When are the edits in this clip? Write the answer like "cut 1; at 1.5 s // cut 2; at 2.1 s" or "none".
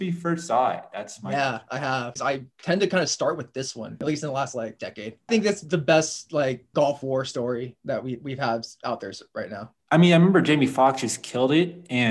cut 1; at 2.2 s